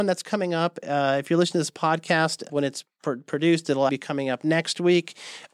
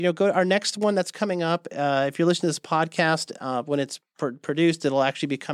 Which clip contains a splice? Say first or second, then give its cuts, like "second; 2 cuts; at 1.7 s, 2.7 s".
first; 2 cuts; at 2.5 s, 3.9 s